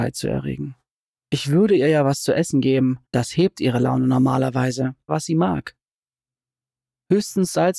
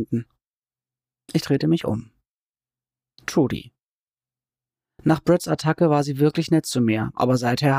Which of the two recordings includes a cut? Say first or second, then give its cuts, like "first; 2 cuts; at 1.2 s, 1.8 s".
first; 3 cuts; at 1.2 s, 3.0 s, 5.1 s